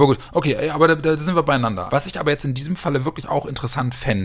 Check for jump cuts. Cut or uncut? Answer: cut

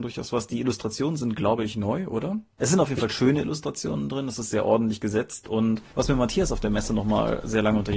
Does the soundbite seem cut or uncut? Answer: cut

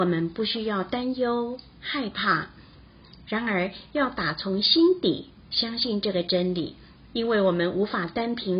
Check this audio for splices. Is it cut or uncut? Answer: cut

